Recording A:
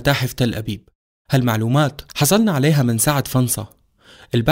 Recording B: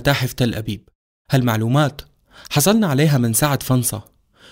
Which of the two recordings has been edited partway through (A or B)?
A